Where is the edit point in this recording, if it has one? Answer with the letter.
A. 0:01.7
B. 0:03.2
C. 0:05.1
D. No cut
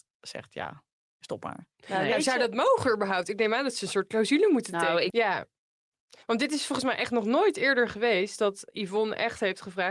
C